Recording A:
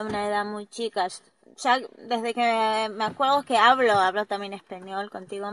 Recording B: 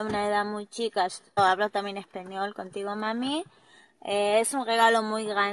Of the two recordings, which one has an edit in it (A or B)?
B